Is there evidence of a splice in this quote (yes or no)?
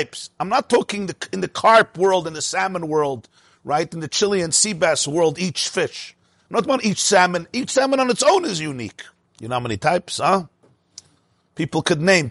yes